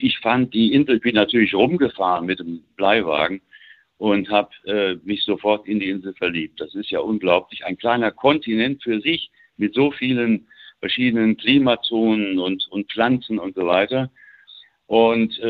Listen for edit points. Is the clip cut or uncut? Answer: uncut